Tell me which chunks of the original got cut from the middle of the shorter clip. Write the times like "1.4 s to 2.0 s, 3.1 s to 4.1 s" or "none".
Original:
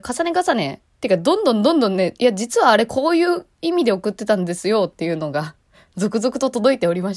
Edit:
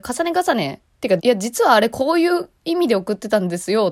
1.2 s to 2.2 s